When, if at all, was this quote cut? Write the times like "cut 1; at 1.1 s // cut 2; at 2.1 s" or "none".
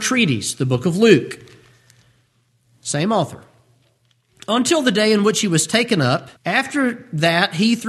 cut 1; at 6.4 s